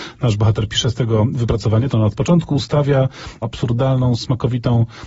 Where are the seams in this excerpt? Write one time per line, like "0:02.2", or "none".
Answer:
0:01.9
0:03.4